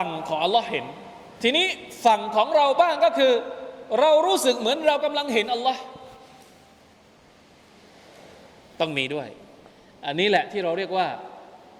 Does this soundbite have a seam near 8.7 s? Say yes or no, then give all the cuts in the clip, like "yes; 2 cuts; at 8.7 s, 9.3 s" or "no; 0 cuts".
no; 1 cut; at 1.3 s